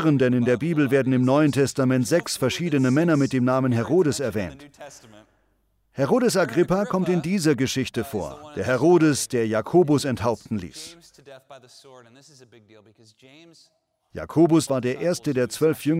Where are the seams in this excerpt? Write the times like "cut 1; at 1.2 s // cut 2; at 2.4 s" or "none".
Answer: cut 1; at 14.7 s